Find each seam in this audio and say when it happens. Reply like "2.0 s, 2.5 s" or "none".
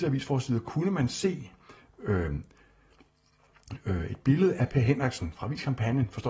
5.3 s